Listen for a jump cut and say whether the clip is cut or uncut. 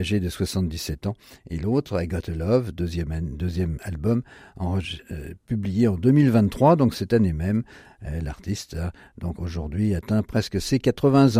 uncut